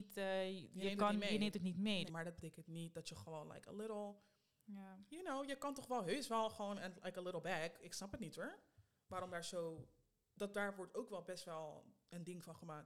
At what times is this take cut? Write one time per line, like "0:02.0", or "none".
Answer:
0:02.1